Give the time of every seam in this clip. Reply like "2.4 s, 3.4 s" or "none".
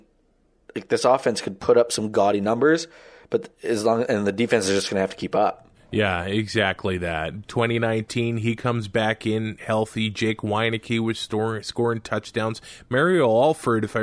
7.4 s